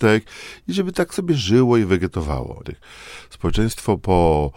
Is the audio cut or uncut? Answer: cut